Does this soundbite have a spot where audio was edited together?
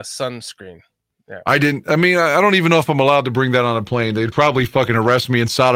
no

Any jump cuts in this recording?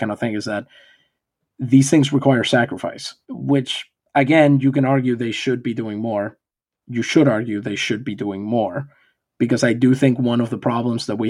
yes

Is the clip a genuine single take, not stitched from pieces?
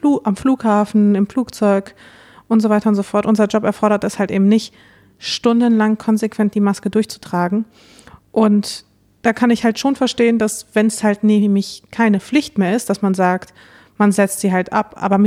yes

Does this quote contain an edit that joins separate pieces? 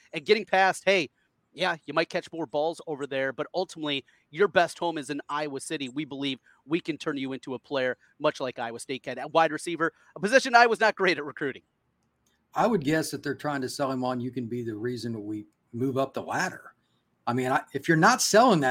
no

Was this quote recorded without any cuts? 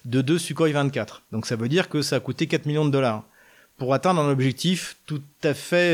no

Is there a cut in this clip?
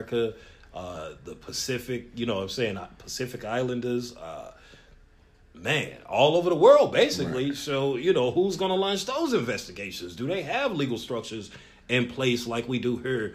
no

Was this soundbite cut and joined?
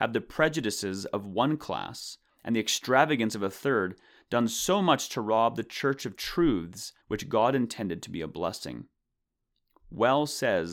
yes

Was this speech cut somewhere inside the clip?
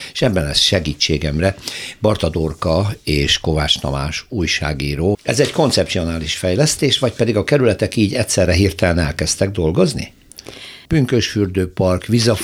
yes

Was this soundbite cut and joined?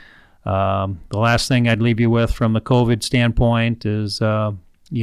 no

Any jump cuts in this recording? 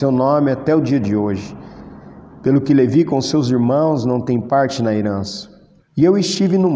yes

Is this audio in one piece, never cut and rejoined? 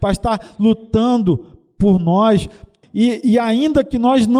no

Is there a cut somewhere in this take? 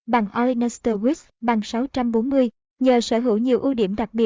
no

